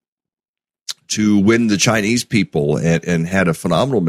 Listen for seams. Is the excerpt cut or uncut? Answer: uncut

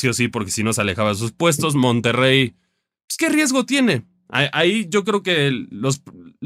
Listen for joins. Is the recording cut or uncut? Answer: cut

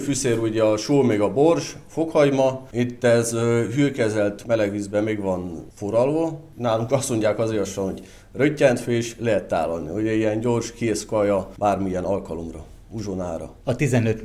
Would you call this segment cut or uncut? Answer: uncut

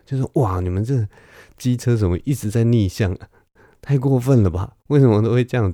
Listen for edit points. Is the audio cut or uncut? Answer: uncut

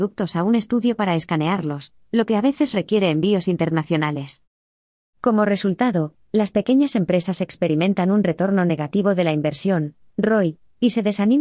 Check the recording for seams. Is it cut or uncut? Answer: uncut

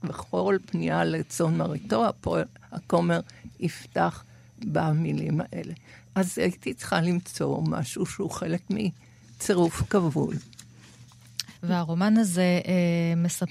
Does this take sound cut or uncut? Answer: cut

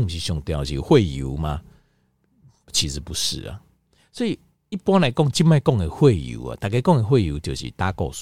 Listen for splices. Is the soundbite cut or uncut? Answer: uncut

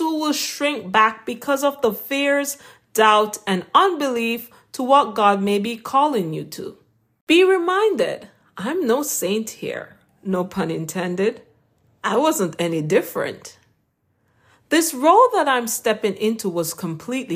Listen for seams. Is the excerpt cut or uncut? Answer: uncut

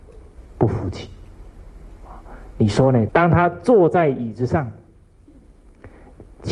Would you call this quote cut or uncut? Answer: cut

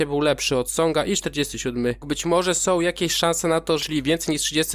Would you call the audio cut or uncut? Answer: cut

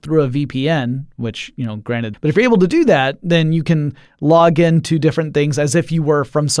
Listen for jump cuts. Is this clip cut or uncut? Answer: cut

